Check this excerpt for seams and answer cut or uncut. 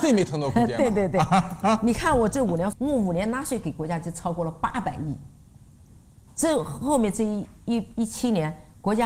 uncut